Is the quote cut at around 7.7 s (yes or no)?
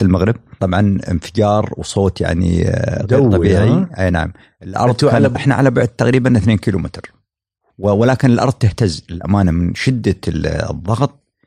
no